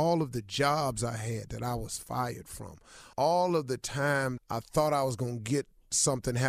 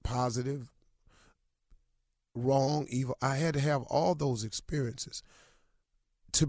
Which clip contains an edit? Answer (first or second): first